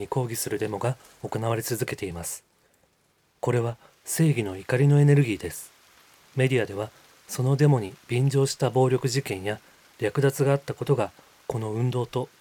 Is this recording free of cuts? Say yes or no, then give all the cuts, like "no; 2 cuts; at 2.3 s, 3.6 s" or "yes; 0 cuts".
yes; 0 cuts